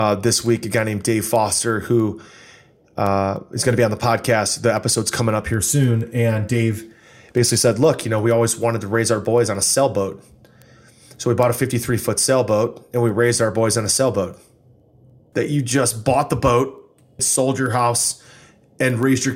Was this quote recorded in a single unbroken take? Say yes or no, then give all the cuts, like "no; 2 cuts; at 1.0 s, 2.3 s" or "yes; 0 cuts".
no; 2 cuts; at 15.3 s, 17.2 s